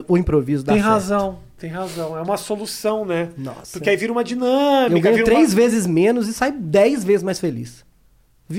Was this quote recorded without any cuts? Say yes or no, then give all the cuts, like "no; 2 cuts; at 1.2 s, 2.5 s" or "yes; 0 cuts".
yes; 0 cuts